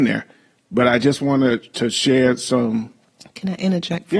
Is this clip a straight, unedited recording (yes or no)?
yes